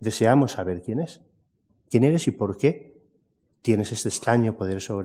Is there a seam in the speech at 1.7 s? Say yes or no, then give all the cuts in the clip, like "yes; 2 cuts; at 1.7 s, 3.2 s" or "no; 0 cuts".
yes; 1 cut; at 1.7 s